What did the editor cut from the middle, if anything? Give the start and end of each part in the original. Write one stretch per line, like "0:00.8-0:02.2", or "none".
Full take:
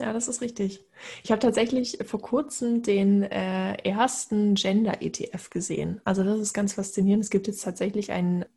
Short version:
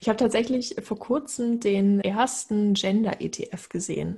0:03.2-0:03.8